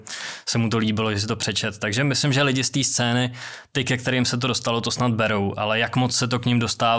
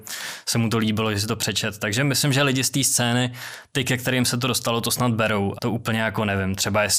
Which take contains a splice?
second; 1 cut; at 5.6 s

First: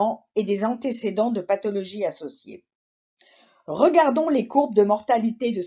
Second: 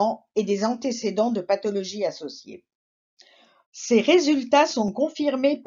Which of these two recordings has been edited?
second; 1 cut; at 3.6 s

